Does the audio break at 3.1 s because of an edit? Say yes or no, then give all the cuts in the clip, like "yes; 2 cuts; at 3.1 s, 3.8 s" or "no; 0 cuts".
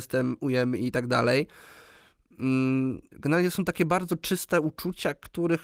yes; 1 cut; at 3.1 s